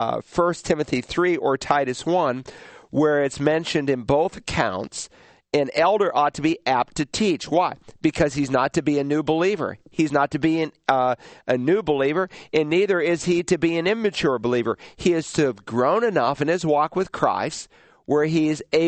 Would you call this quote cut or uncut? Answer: uncut